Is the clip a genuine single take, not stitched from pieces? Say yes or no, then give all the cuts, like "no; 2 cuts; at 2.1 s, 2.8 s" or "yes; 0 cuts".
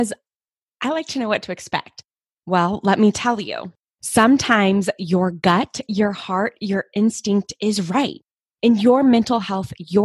no; 1 cut; at 2.3 s